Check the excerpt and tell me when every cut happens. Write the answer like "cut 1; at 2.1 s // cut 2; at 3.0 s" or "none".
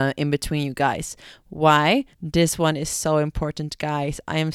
cut 1; at 2.1 s

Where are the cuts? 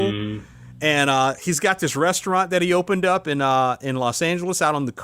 none

